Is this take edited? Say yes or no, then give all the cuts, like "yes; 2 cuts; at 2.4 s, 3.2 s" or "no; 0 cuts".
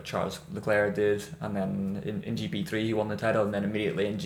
no; 0 cuts